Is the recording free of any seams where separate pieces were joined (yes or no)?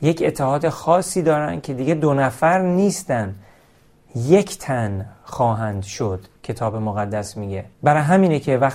no